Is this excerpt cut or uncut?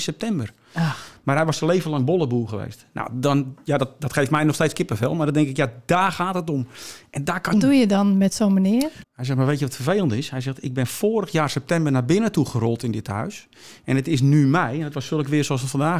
cut